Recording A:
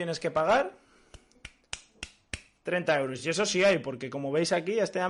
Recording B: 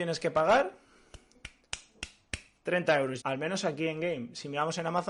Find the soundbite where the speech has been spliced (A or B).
B